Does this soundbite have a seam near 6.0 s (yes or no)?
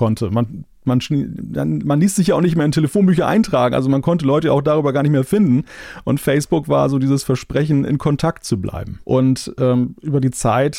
no